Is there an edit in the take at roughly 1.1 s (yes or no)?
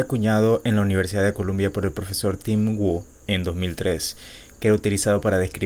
no